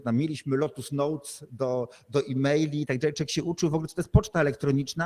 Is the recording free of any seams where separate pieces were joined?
yes; 0 cuts

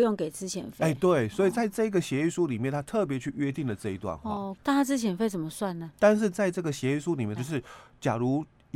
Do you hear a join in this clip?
yes; 3 cuts; at 4.6 s, 5.9 s, 7.4 s

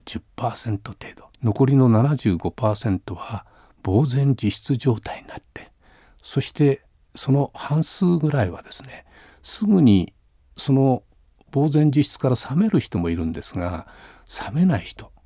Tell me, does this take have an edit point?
yes; 1 cut; at 1.4 s

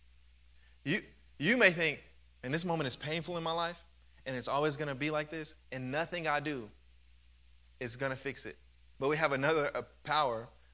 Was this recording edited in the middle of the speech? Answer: yes; 1 cut; at 9.0 s

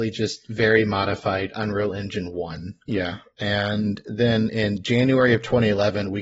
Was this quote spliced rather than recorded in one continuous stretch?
yes; 1 cut; at 2.8 s

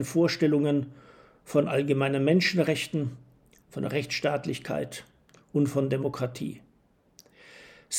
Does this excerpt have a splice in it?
no; 0 cuts

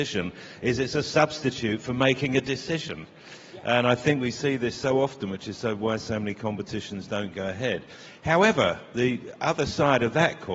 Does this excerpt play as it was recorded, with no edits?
yes; 0 cuts

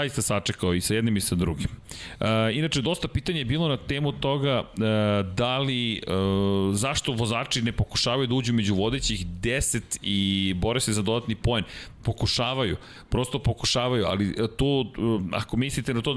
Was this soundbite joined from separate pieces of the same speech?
no; 0 cuts

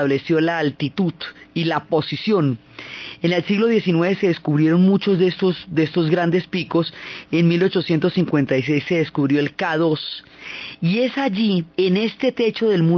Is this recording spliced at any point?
yes; 1 cut; at 11.7 s

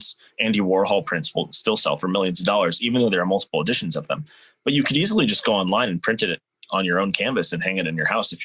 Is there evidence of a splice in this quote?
no; 0 cuts

